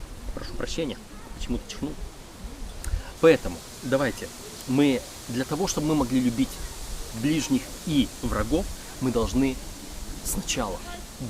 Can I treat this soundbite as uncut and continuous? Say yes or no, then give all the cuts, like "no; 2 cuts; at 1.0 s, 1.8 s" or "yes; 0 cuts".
no; 1 cut; at 3.2 s